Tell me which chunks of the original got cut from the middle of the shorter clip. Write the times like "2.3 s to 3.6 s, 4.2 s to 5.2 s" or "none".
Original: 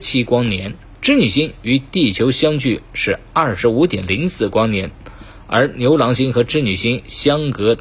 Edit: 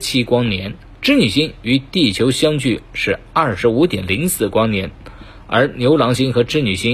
none